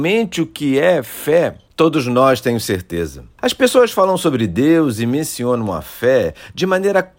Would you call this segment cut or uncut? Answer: cut